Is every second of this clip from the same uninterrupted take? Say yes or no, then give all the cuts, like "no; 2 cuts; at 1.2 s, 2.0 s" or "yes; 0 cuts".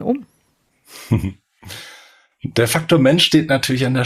yes; 0 cuts